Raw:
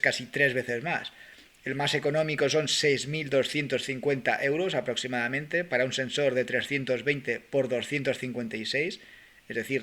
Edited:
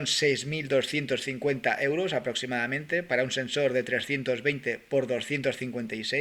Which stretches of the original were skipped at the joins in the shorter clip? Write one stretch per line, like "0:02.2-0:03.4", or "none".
none